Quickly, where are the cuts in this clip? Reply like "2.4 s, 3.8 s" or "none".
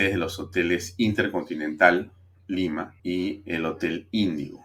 3.0 s

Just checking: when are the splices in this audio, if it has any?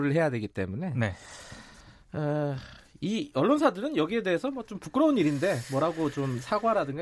none

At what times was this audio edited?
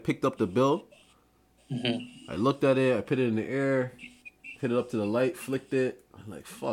none

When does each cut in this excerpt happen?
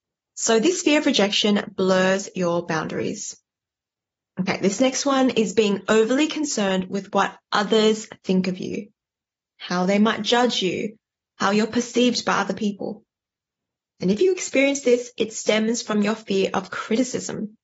none

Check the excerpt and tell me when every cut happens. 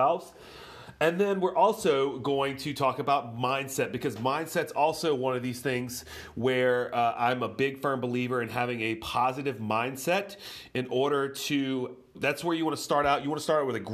12.1 s

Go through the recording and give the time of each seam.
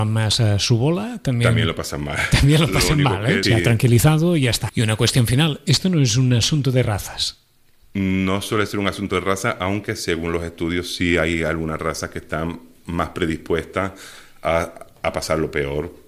3.4 s, 4.7 s

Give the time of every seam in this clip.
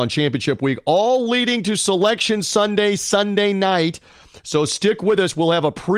none

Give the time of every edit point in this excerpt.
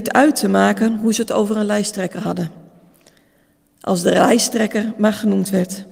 none

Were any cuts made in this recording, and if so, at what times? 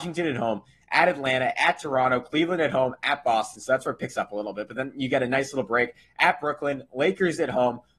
none

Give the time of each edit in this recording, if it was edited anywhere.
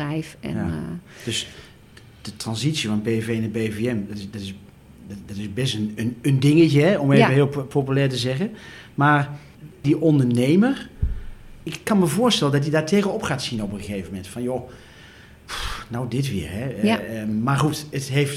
none

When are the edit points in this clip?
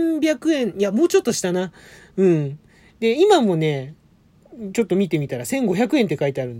none

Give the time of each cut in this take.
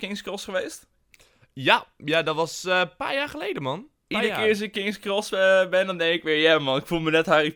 none

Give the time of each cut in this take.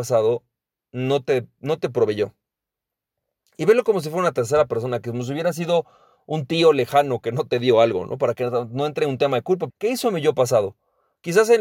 9.7 s

